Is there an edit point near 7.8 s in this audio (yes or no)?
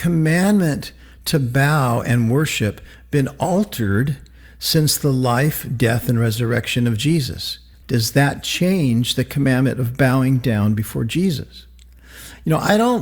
yes